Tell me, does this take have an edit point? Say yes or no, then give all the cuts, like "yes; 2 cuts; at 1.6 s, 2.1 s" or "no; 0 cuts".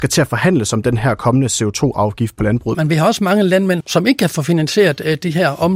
yes; 2 cuts; at 2.7 s, 3.8 s